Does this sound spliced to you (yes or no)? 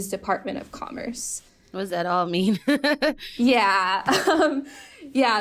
no